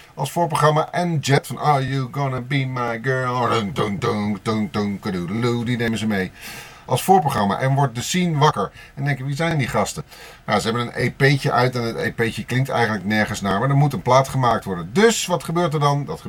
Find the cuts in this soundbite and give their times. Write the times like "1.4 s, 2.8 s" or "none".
7.6 s